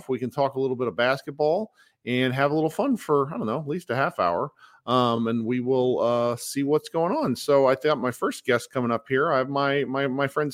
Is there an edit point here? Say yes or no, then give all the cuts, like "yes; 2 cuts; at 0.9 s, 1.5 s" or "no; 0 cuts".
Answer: no; 0 cuts